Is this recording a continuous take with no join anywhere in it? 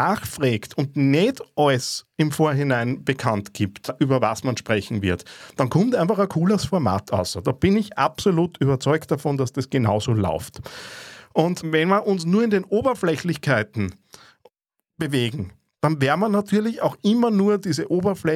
yes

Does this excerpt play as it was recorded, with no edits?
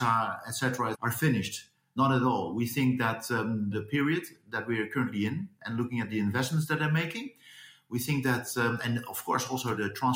no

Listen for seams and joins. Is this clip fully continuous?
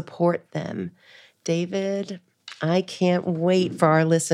yes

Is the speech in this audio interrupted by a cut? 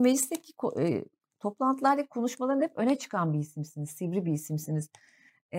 no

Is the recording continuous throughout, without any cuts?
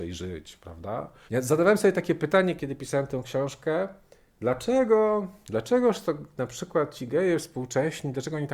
no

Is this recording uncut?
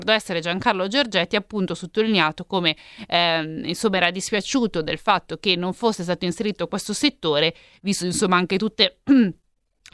yes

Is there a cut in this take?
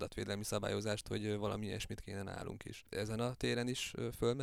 no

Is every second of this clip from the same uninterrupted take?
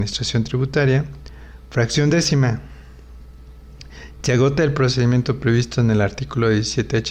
yes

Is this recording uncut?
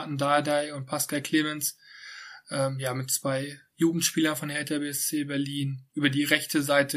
yes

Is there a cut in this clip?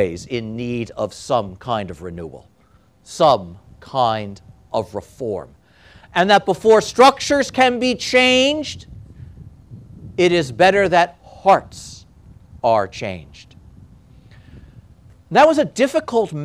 no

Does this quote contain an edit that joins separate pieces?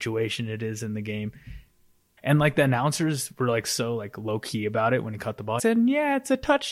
yes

